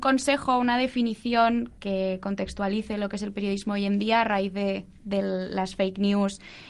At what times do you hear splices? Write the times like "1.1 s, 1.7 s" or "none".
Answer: 1.8 s